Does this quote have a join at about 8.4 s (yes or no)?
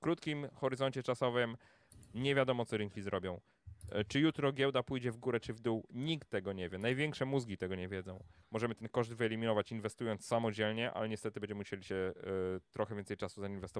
yes